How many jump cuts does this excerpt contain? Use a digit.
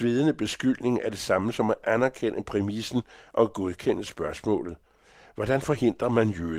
0